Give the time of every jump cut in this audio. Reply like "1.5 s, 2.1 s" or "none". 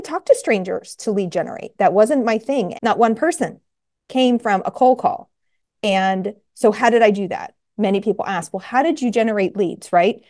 2.7 s